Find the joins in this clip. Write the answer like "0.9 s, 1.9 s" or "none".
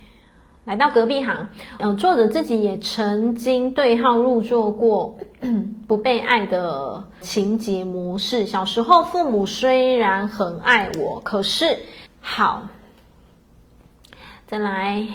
1.8 s, 7.2 s, 12.1 s